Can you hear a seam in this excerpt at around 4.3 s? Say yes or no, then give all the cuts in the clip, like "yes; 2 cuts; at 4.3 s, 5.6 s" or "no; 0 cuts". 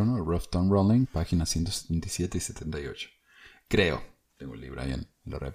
yes; 1 cut; at 4.3 s